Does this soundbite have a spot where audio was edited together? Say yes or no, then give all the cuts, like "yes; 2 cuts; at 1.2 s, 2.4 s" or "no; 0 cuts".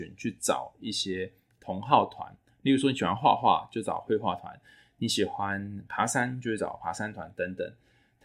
no; 0 cuts